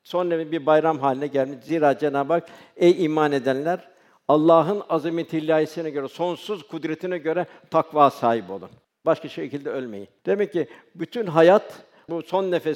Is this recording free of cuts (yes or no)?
no